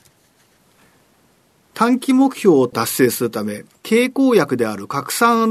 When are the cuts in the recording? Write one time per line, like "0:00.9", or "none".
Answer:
0:03.8